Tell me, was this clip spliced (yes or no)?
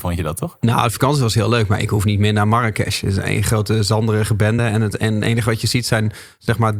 no